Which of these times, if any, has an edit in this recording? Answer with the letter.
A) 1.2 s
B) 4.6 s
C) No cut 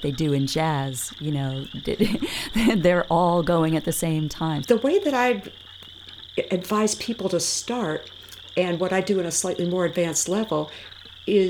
B